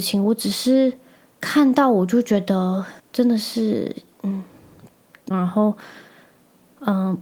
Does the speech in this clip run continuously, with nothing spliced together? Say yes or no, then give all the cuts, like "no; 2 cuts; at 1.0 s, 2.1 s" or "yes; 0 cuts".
no; 2 cuts; at 3.0 s, 5.3 s